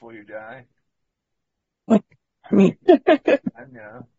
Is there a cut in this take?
yes; 1 cut; at 2.8 s

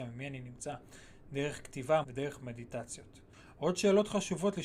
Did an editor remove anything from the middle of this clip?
yes; 1 cut; at 2.0 s

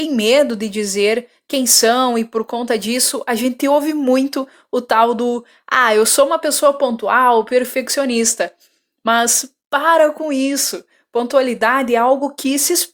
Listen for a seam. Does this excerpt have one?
no; 0 cuts

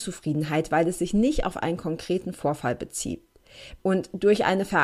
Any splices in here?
yes; 1 cut; at 3.8 s

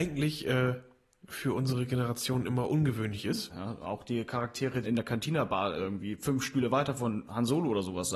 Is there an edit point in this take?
yes; 2 cuts; at 3.5 s, 4.8 s

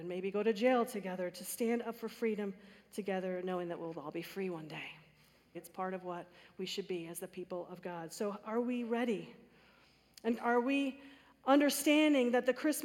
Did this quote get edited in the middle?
yes; 2 cuts; at 5.5 s, 10.4 s

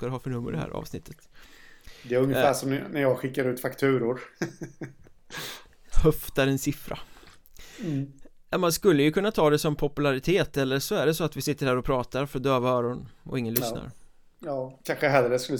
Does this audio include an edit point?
no; 0 cuts

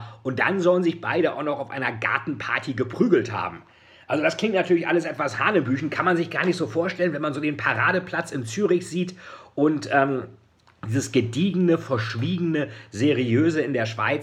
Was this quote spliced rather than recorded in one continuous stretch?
no; 0 cuts

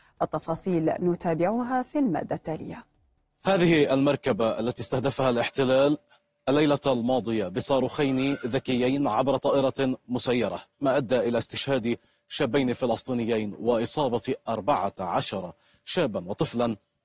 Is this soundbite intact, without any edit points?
no; 1 cut; at 10.7 s

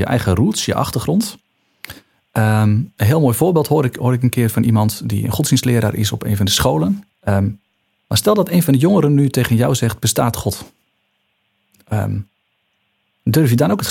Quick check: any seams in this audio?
yes; 2 cuts; at 2.1 s, 7.1 s

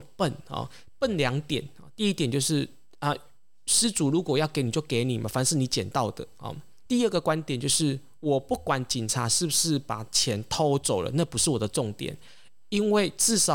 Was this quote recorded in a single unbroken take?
no; 1 cut; at 6.9 s

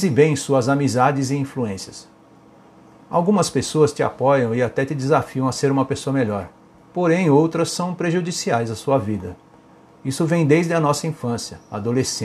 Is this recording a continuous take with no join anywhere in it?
no; 1 cut; at 9.9 s

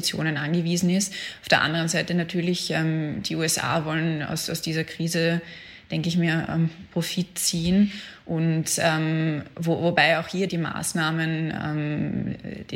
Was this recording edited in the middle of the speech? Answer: yes; 1 cut; at 10.5 s

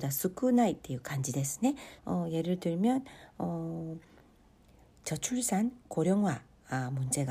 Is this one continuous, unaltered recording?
no; 1 cut; at 2.0 s

